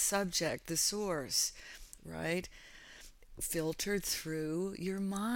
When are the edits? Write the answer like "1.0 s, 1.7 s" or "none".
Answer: 2.0 s